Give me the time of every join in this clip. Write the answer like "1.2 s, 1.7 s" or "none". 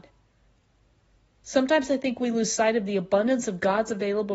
none